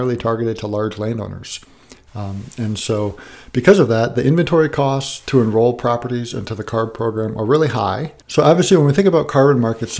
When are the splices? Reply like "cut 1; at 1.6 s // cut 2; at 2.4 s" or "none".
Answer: cut 1; at 2.1 s // cut 2; at 8.2 s

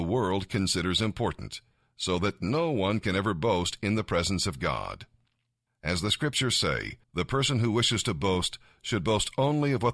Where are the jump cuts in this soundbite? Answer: cut 1; at 5.7 s // cut 2; at 7.0 s

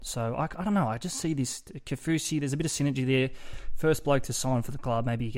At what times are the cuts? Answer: none

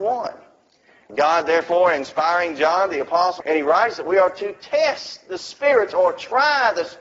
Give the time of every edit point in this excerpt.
cut 1; at 3.4 s

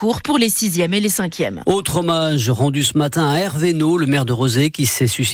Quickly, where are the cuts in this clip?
cut 1; at 1.6 s

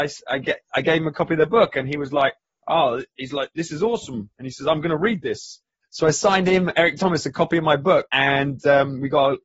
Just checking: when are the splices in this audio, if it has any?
cut 1; at 5.8 s // cut 2; at 8.1 s

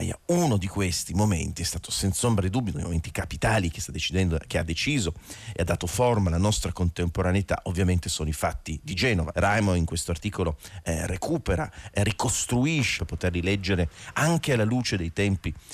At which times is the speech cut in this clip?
cut 1; at 9.3 s // cut 2; at 13.0 s

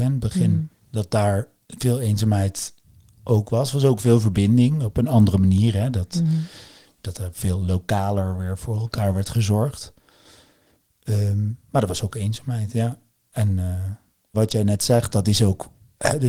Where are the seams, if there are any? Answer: cut 1; at 14.3 s

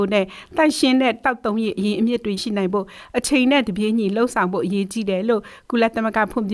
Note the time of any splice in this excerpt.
cut 1; at 2.4 s

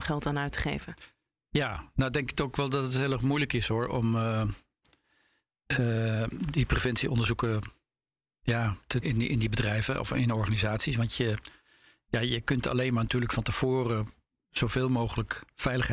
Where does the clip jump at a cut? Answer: cut 1; at 9.0 s

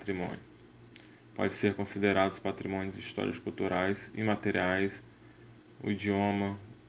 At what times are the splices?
none

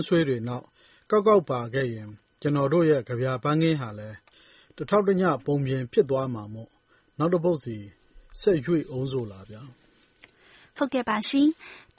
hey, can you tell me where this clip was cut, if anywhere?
none

